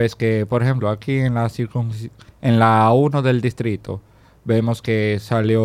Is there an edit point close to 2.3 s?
no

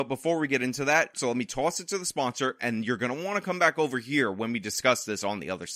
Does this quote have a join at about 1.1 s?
yes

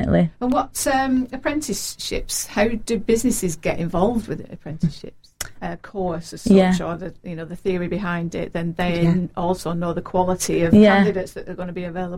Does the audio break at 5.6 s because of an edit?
yes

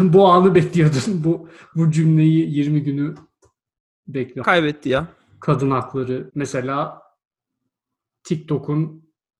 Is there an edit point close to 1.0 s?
no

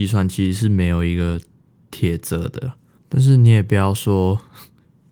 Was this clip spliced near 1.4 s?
no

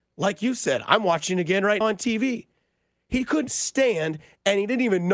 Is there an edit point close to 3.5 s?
yes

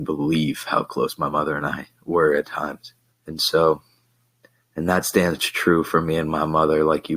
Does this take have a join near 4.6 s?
no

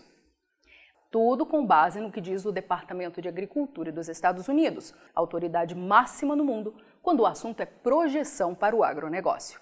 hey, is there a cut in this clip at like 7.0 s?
no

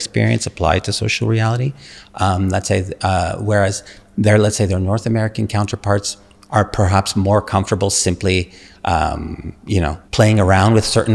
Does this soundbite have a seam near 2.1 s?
no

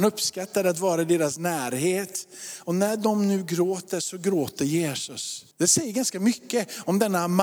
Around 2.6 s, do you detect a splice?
no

